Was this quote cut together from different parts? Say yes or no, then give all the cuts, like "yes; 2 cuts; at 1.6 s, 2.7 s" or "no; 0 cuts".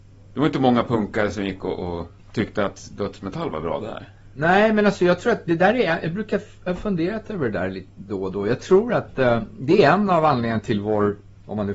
no; 0 cuts